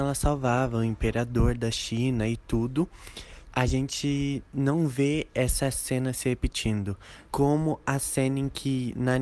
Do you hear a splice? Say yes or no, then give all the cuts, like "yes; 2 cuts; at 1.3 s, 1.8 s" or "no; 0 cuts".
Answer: yes; 2 cuts; at 3.4 s, 7.3 s